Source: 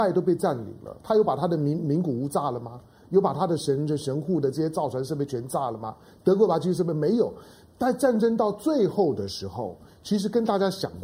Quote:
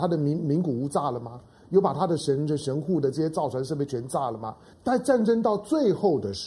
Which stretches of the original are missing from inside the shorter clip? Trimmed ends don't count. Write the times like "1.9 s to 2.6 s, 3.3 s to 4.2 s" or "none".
6.1 s to 7.7 s